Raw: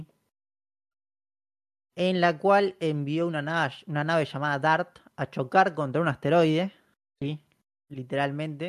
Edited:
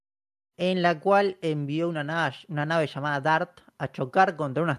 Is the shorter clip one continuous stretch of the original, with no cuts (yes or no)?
yes